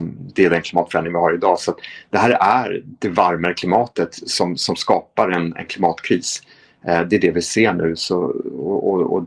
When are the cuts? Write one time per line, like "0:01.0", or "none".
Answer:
none